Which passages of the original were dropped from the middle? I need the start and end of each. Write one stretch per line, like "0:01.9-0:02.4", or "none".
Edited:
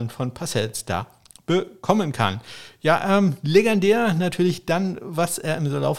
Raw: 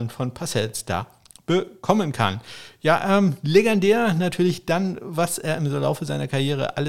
none

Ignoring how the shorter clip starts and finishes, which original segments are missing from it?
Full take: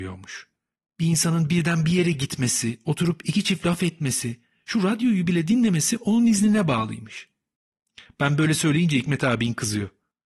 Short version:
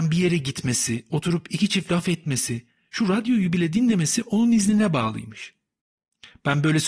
none

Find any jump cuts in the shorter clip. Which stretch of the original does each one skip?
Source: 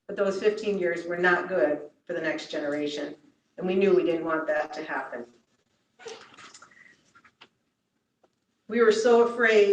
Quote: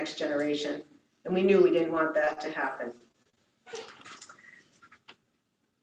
none

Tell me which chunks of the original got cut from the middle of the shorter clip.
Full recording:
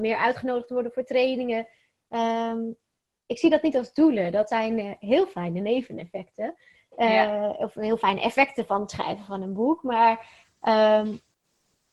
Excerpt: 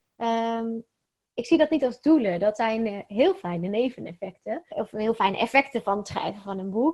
0:06.6-0:07.5

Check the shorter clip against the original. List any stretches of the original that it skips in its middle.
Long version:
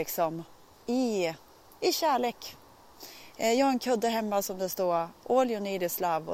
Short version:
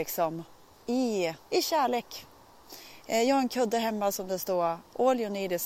0:01.4-0:01.8

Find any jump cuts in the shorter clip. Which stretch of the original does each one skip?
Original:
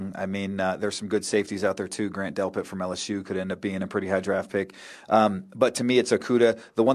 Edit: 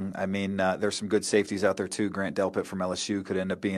none

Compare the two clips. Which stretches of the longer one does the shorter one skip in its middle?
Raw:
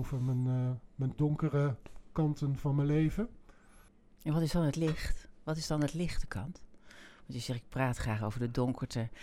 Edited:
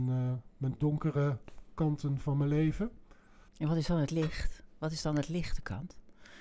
0:03.9-0:04.1

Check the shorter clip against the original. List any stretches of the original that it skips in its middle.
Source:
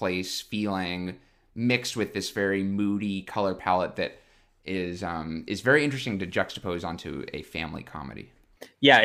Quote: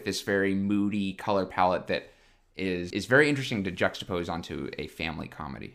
0:05.0-0:05.5

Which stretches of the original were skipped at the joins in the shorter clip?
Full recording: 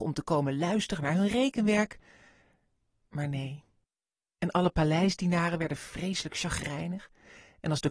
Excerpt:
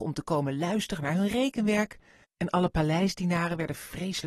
0:02.2-0:04.3

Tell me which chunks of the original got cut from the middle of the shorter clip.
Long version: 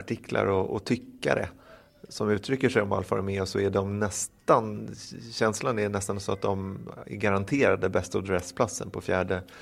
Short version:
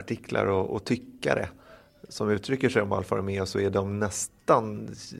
none

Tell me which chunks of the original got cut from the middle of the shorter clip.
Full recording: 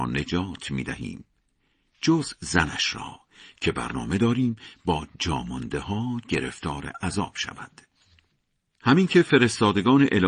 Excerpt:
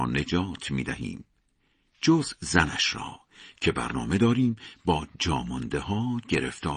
none

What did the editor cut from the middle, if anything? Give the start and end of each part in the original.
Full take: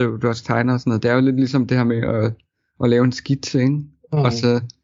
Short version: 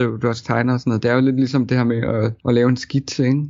0:02.4-0:02.7

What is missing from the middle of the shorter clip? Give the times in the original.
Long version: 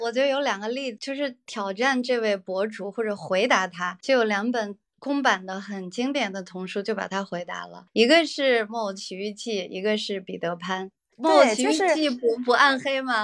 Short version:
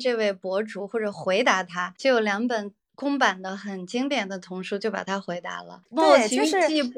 0:07.9-0:11.1

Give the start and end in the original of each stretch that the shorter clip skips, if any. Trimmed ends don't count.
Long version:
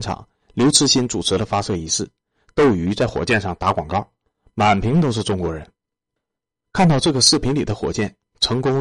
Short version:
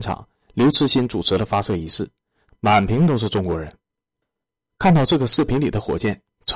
0:02.5-0:04.4

